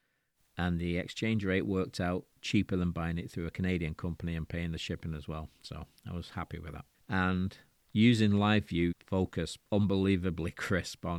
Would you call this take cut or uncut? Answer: cut